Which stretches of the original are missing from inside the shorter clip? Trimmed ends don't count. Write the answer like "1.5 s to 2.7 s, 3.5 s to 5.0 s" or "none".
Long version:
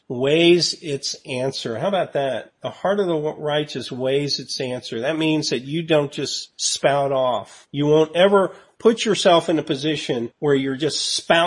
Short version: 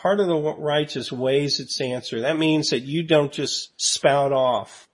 none